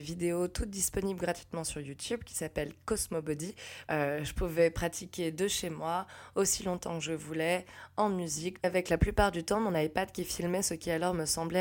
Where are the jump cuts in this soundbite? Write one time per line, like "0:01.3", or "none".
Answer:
0:08.6